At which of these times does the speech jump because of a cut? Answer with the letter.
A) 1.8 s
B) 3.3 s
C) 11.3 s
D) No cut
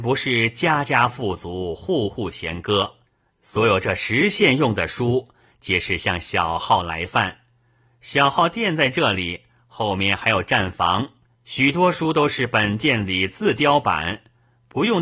C